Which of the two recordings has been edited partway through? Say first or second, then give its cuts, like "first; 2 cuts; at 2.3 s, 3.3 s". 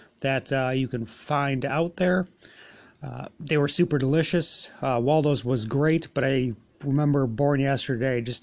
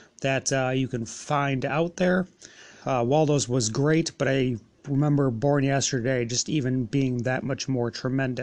second; 1 cut; at 2.8 s